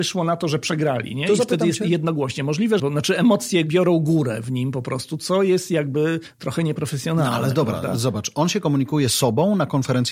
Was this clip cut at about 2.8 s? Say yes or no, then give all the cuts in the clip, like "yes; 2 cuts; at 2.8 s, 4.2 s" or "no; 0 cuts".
yes; 1 cut; at 2.8 s